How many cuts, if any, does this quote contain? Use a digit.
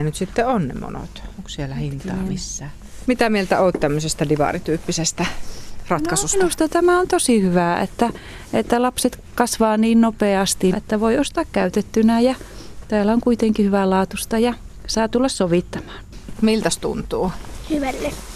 3